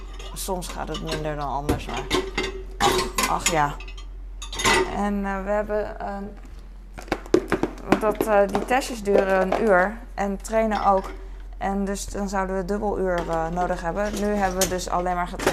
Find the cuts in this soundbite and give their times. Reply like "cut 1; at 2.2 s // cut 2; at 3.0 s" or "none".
none